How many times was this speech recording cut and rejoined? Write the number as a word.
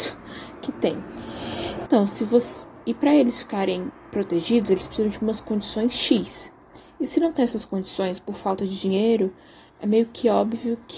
two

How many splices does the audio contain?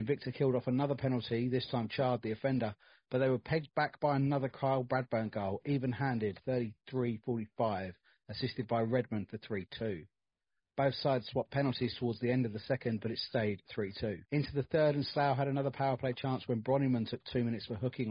one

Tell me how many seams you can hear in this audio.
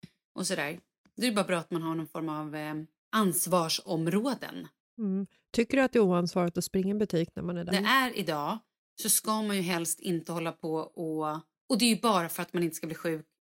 one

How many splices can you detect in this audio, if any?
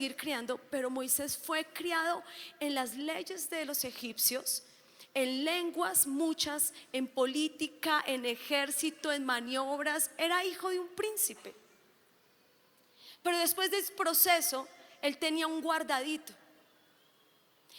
zero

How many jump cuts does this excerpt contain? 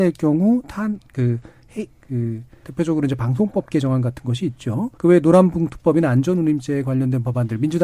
two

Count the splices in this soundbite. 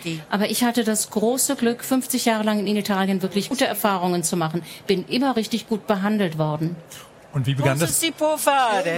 one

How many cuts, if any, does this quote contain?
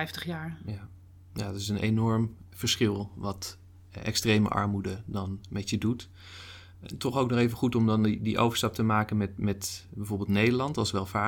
zero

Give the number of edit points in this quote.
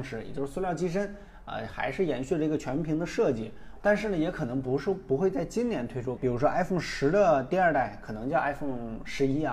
two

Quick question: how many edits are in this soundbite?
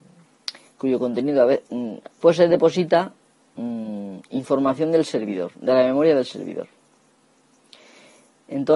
one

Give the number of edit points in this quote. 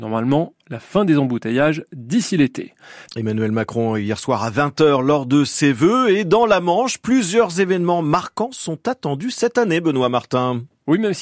one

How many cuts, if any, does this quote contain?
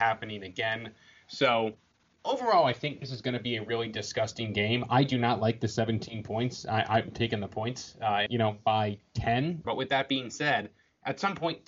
two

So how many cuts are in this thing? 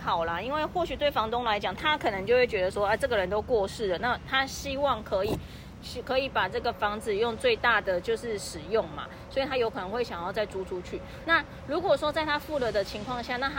two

